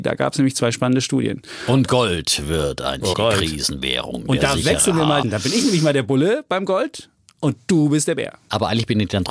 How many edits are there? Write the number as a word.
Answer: two